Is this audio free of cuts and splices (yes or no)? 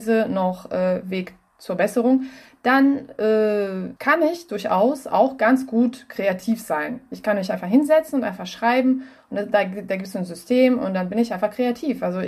no